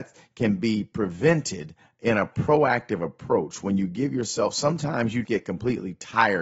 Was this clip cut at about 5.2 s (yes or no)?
yes